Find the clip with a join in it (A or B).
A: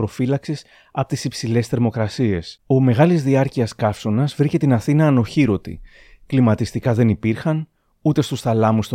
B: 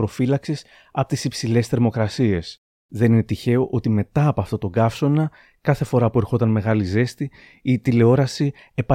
A